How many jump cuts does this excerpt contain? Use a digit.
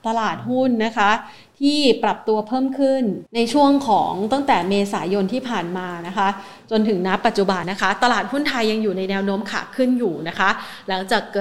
2